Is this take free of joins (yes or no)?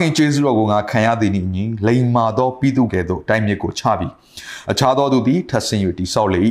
no